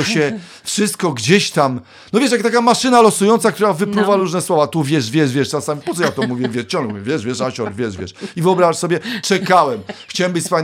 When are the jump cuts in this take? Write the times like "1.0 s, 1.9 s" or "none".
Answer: none